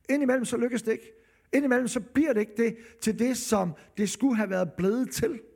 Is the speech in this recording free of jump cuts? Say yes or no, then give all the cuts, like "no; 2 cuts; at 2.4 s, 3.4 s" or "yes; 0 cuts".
yes; 0 cuts